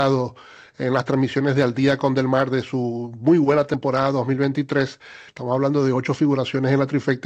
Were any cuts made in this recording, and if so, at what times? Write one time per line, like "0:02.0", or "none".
0:05.3

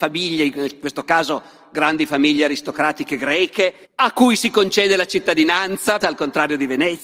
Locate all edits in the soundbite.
0:03.8
0:06.0

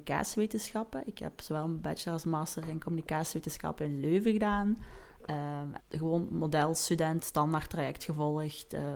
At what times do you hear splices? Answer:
0:05.8
0:07.2

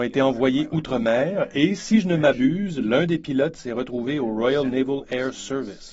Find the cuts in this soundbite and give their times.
none

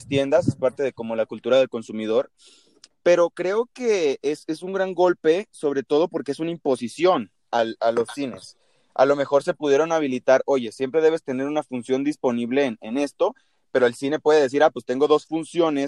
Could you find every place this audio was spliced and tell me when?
none

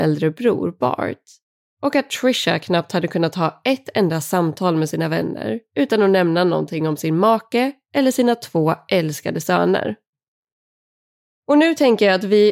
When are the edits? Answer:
0:11.4

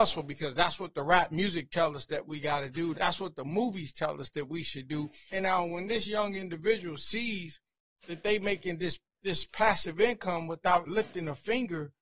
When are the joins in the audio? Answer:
0:02.9
0:05.3
0:10.9

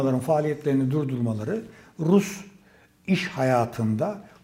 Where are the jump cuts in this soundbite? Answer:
none

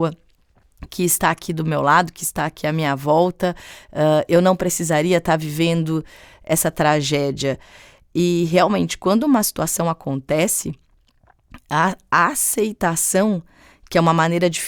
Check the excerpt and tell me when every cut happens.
none

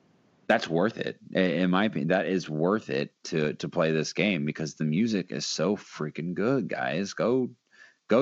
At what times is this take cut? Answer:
none

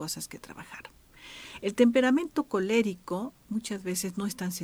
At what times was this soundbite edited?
0:01.6

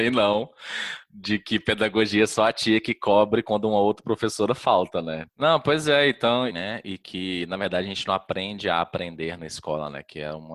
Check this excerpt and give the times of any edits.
0:05.3
0:06.5

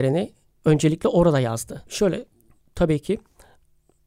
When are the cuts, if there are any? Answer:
0:01.9

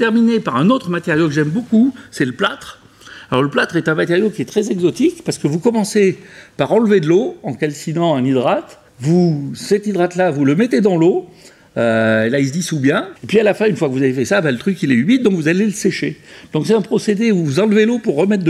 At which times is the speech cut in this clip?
0:08.9
0:13.2

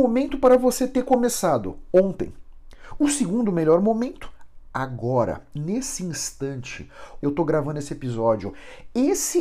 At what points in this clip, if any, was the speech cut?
0:07.2

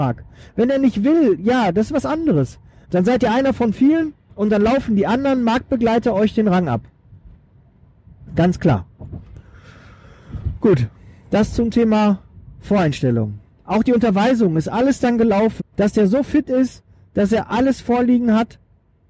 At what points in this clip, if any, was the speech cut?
0:02.8
0:15.6

